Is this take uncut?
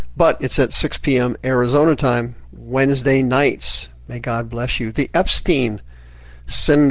yes; 0 cuts

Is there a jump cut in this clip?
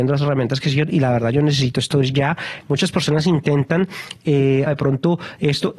yes; 2 cuts; at 2.6 s, 4.7 s

